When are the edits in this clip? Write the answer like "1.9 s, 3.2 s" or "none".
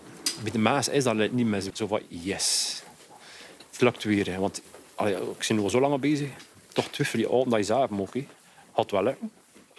1.7 s